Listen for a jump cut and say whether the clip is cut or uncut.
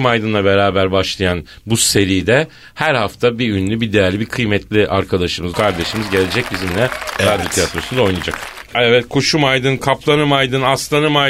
cut